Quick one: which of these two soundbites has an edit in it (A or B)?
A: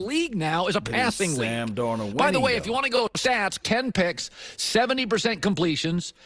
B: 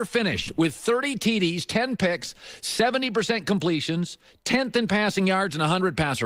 A